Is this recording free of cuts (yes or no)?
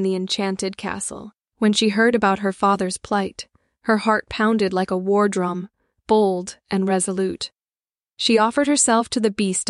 no